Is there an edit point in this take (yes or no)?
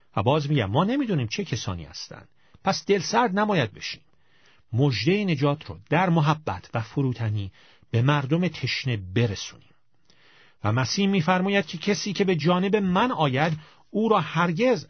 no